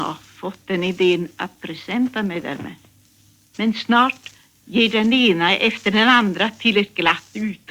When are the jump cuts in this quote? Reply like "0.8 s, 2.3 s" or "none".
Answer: 3.5 s